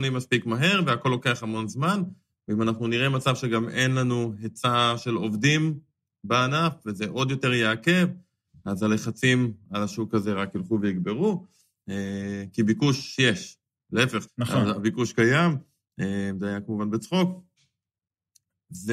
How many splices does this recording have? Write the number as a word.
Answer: one